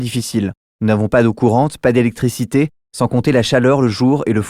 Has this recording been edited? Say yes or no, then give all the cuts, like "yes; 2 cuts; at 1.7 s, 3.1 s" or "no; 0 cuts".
yes; 1 cut; at 2.8 s